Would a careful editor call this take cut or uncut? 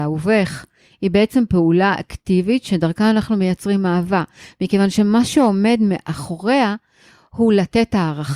uncut